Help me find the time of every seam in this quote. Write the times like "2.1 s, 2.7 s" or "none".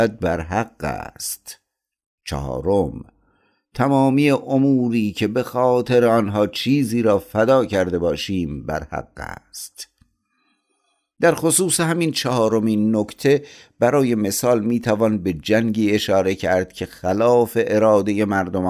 none